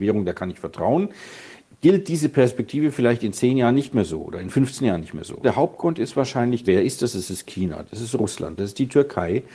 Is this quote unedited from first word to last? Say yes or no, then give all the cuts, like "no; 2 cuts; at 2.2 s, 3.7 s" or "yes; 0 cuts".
no; 3 cuts; at 5.4 s, 6.7 s, 8.6 s